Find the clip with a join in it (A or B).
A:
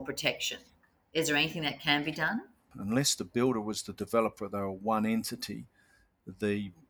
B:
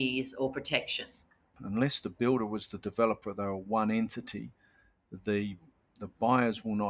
B